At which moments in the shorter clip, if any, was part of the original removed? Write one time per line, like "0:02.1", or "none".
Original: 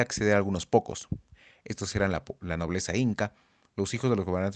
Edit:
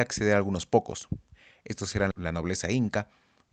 0:02.1